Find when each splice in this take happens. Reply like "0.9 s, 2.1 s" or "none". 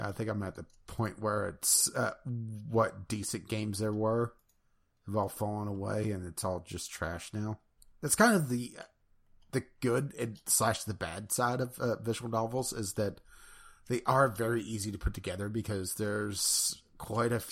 none